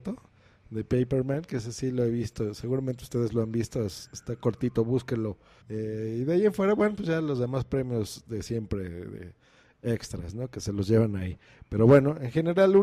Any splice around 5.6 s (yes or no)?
yes